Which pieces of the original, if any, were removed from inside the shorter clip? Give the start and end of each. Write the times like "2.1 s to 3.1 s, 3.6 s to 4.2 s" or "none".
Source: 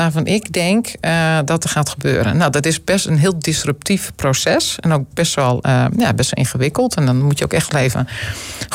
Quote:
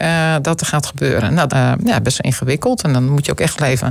2.5 s to 5.6 s